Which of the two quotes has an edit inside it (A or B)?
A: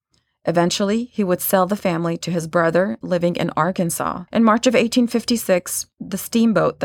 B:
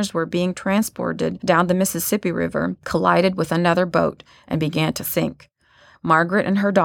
A